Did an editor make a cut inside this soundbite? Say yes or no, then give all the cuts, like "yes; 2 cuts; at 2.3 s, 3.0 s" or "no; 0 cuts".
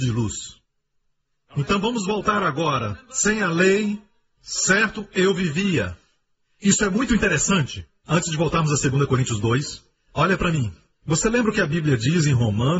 no; 0 cuts